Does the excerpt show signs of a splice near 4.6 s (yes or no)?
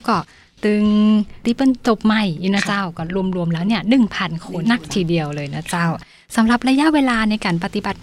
yes